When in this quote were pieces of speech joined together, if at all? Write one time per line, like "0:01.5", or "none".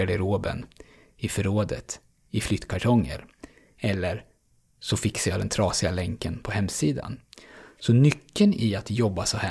none